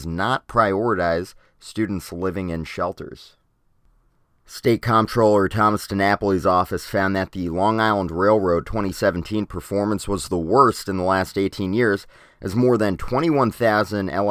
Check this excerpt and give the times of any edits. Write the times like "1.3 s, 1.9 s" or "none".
none